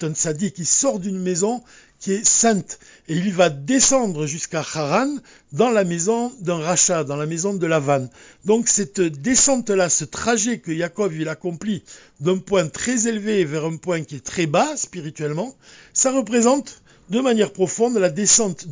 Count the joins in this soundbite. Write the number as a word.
zero